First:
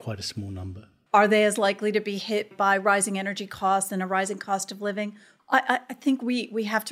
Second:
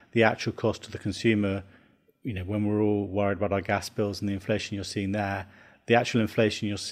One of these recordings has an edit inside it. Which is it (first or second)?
first